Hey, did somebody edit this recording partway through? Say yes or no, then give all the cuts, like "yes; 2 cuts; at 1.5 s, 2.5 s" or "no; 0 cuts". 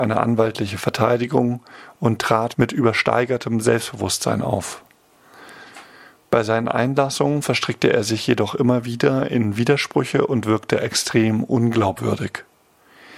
yes; 1 cut; at 2.5 s